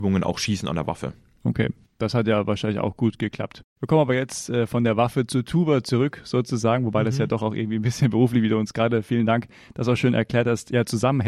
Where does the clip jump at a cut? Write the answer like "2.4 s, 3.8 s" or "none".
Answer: 3.7 s